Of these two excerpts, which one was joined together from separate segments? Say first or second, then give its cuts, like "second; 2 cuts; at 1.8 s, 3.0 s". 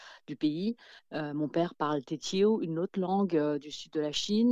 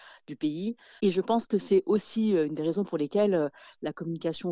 second; 1 cut; at 1.0 s